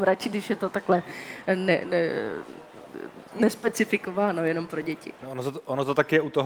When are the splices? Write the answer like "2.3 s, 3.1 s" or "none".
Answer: none